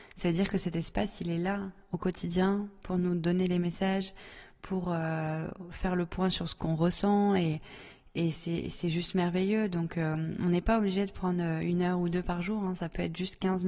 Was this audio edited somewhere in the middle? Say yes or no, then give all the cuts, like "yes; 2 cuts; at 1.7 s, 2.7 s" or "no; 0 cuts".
no; 0 cuts